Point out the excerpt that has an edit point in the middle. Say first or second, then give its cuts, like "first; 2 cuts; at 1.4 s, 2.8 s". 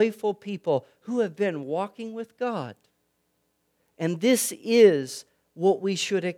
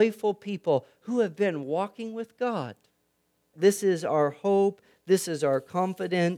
second; 1 cut; at 3.5 s